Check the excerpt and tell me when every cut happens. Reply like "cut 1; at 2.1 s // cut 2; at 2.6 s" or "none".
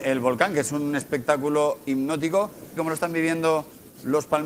cut 1; at 2.8 s